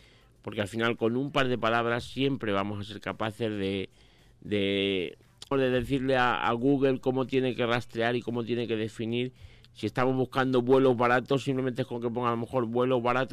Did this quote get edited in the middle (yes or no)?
yes